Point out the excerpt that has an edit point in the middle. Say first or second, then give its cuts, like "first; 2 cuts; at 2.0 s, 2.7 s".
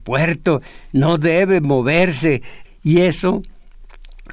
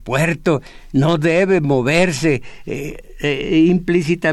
first; 1 cut; at 2.6 s